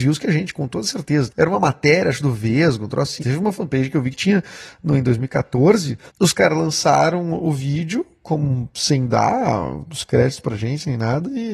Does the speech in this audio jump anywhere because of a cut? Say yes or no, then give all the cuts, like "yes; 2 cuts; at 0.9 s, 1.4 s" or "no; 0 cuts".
yes; 3 cuts; at 1.3 s, 3.2 s, 6.1 s